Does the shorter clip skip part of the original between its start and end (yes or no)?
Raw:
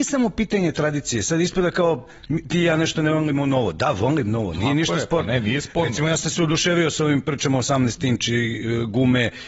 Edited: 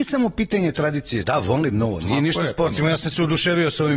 yes